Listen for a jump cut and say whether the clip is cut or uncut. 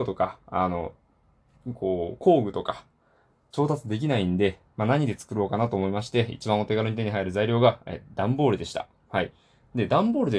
uncut